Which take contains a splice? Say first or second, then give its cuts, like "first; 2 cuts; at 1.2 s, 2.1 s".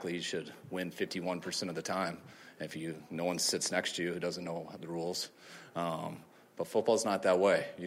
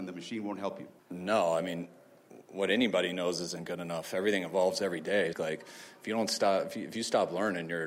second; 2 cuts; at 1.0 s, 5.3 s